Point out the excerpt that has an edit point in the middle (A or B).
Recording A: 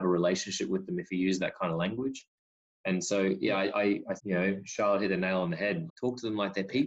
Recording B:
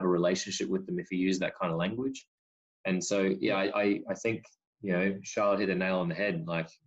A